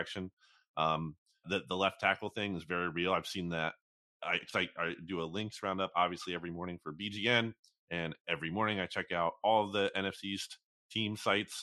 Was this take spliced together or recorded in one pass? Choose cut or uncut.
cut